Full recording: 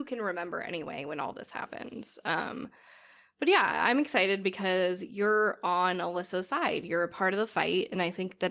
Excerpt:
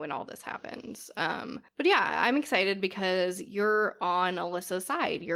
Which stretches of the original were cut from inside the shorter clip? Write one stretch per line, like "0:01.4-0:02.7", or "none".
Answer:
0:02.8-0:03.3